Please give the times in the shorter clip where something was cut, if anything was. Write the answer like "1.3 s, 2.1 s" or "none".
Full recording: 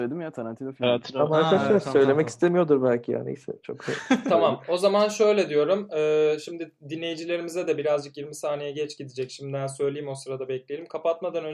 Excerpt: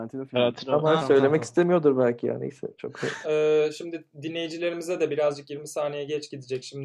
1.0 s, 3.2 s

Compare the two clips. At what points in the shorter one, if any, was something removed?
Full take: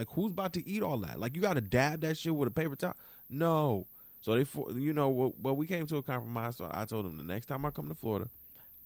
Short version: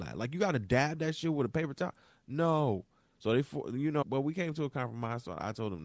4.0 s

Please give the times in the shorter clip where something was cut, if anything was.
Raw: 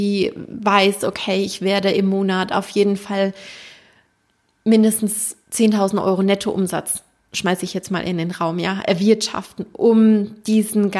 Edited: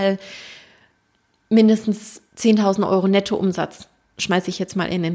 none

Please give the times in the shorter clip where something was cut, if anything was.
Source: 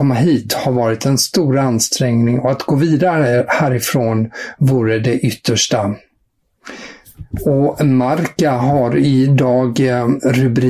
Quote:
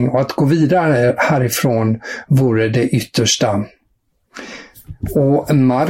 none

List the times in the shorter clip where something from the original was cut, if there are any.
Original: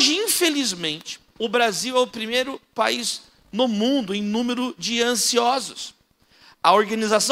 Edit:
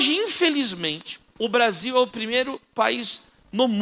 none

